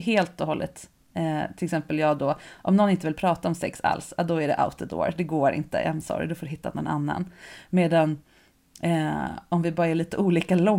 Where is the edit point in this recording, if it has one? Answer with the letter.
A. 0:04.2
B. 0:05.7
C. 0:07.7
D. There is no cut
D